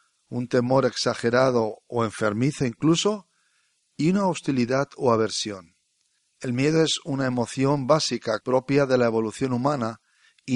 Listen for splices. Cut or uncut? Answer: cut